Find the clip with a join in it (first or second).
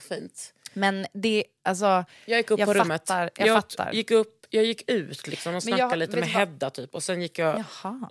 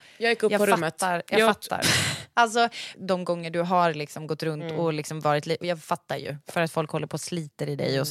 second